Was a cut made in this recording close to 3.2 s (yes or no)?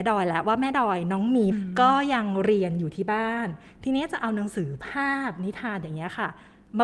no